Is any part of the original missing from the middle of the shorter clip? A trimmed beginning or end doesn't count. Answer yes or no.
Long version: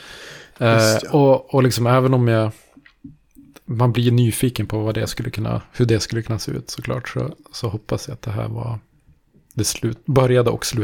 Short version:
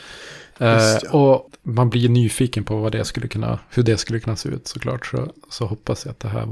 yes